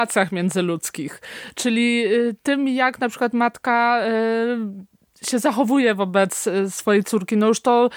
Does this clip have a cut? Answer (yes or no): no